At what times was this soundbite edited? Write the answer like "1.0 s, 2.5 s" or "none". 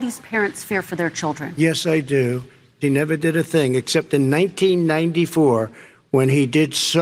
2.8 s